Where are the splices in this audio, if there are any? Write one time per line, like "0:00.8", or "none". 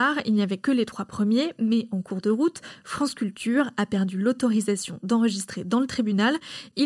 none